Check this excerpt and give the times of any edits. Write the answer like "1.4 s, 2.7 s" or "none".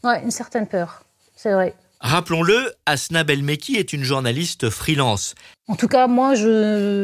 5.5 s